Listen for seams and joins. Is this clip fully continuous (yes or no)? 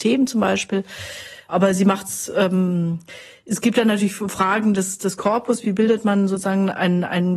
yes